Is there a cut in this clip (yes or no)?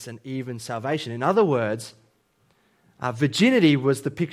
no